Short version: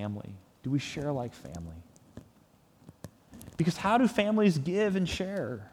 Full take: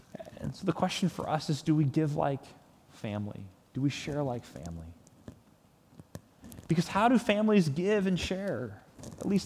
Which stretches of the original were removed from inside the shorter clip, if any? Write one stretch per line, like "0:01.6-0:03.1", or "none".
none

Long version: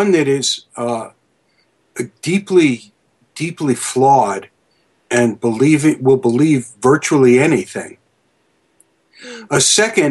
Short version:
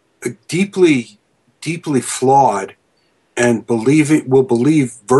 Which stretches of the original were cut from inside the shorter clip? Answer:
none

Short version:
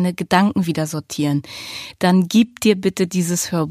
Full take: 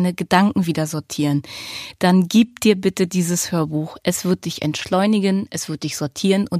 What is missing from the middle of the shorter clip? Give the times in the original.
none

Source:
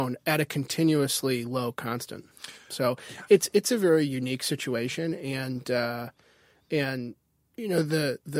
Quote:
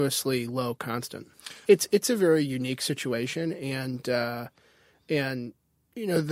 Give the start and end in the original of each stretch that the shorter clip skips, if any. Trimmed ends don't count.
0:02.6-0:03.3

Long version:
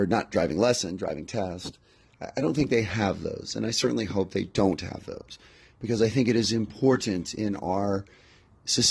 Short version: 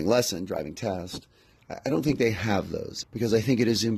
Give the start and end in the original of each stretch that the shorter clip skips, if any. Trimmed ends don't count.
0:03.5-0:05.7

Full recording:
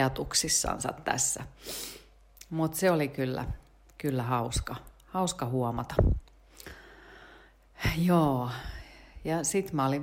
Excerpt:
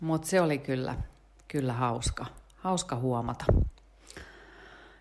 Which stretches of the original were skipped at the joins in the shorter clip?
none

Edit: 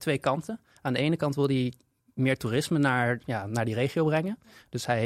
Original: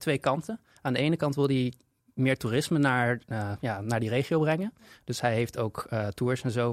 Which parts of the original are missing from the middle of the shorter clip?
0:03.2-0:03.6

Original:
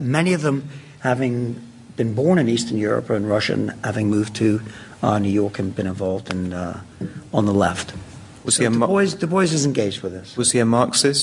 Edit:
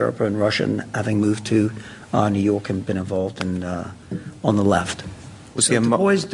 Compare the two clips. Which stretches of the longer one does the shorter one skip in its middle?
none

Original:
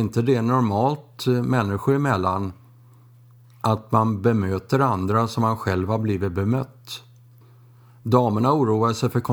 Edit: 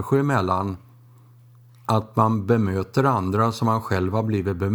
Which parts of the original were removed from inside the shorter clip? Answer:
none

